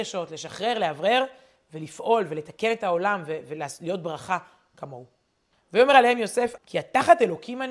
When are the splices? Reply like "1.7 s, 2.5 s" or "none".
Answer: 5.5 s, 6.6 s